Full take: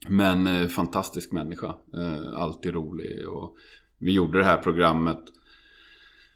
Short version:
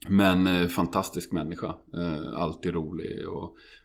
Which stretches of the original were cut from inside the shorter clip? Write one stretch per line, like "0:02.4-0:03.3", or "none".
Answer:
none